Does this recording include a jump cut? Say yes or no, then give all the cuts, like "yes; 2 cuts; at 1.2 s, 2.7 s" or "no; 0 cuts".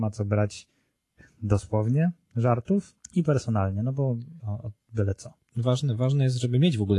yes; 2 cuts; at 3.0 s, 4.4 s